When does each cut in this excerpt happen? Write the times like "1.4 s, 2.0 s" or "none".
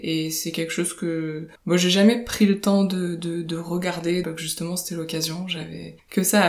1.6 s, 4.2 s